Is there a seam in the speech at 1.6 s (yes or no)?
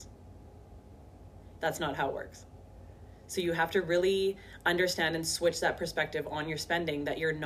yes